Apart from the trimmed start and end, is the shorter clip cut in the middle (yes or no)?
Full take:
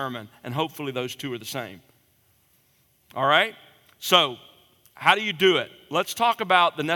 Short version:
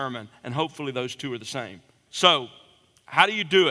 yes